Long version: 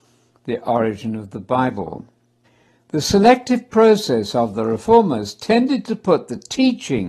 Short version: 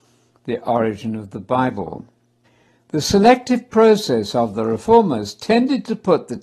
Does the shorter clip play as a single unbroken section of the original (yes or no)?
yes